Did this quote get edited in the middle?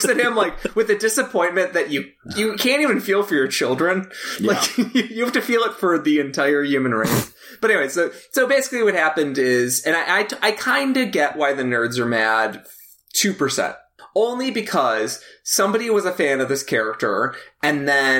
no; 0 cuts

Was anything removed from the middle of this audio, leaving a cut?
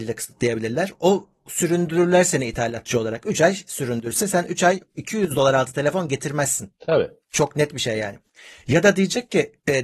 no; 0 cuts

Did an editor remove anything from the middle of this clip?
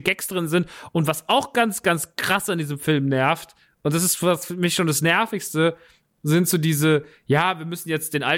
no; 0 cuts

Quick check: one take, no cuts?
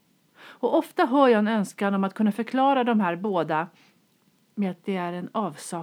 yes; 0 cuts

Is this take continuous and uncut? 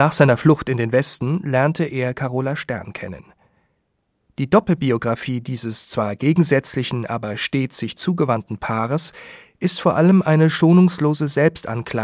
yes; 0 cuts

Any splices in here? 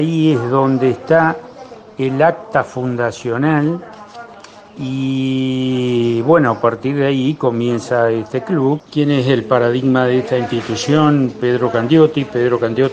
no; 0 cuts

